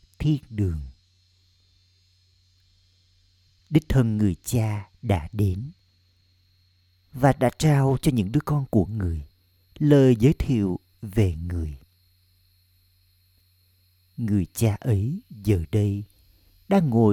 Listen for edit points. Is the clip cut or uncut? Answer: uncut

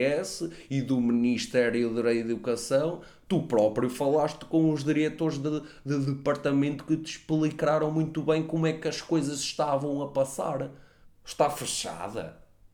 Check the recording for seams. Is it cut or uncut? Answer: cut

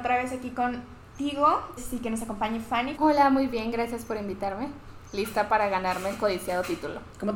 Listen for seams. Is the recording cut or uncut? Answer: cut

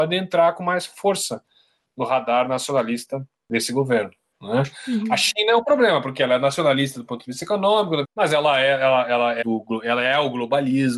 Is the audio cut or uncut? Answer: cut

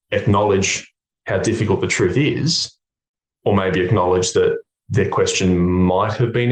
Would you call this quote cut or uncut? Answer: uncut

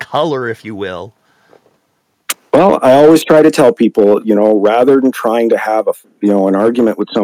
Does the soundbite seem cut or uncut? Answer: uncut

